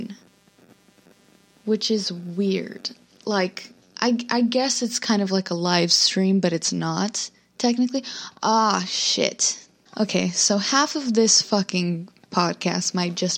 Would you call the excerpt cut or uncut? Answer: cut